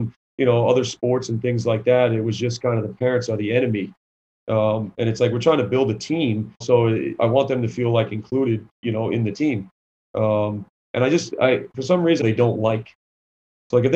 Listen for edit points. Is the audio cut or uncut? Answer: cut